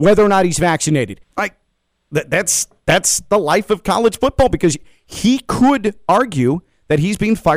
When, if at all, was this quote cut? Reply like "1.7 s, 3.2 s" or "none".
1.2 s